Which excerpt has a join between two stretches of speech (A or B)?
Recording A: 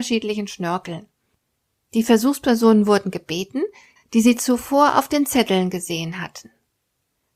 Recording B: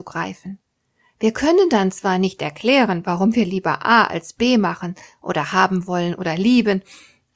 A